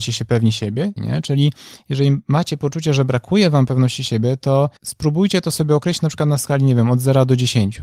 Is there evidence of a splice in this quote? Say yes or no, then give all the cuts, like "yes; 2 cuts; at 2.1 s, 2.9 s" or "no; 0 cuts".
yes; 2 cuts; at 1.0 s, 4.8 s